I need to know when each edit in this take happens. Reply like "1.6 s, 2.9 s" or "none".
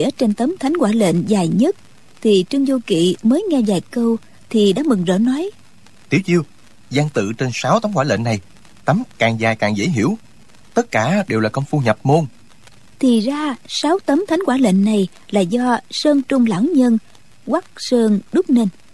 none